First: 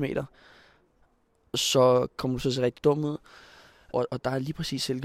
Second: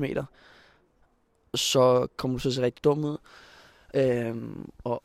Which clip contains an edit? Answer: first; 1 cut; at 3.9 s

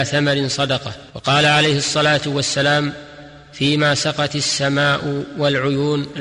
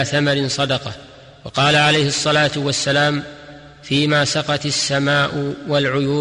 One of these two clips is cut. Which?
first; 1 cut; at 1.1 s

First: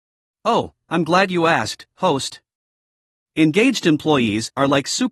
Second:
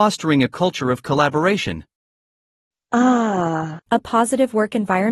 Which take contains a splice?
second; 1 cut; at 3.8 s

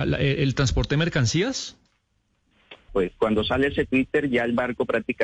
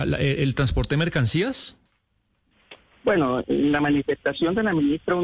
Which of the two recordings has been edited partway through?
first; 1 cut; at 2.9 s

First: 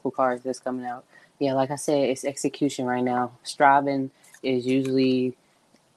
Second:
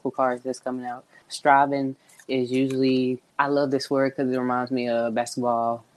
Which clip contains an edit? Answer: second; 2 cuts; at 1.2 s, 3.3 s

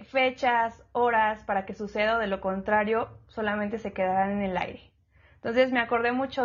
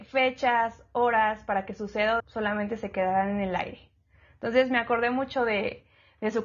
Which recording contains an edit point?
second; 1 cut; at 2.2 s

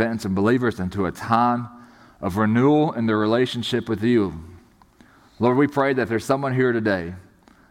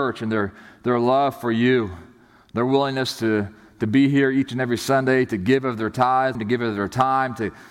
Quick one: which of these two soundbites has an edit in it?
second; 1 cut; at 6.4 s

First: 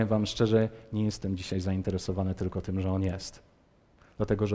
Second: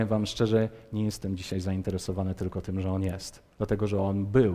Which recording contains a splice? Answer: second; 1 cut; at 3.5 s

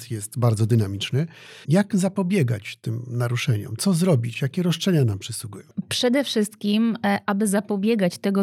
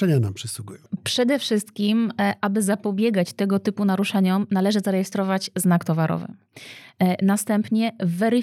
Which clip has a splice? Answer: first; 1 cut; at 1.6 s

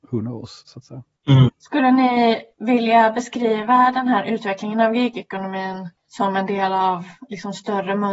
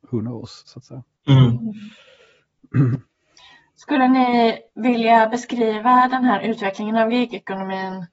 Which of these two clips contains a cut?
first; 2 cuts; at 1.5 s, 6.0 s

